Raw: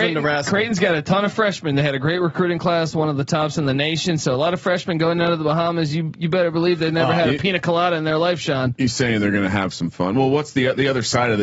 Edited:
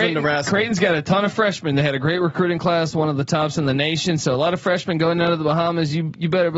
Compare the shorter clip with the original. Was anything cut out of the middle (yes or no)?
no